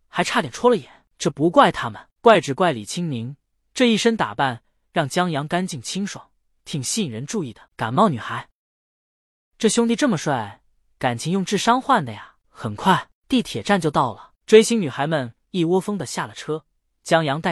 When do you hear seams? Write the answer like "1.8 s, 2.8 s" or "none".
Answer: 1.1 s, 7.7 s, 13.2 s